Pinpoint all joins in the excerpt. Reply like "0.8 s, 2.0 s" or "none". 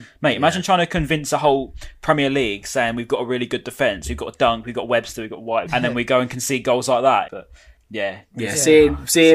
5.7 s, 7.3 s